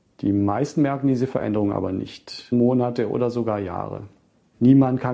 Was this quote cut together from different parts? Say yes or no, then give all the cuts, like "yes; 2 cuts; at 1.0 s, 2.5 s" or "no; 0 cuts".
yes; 1 cut; at 2.5 s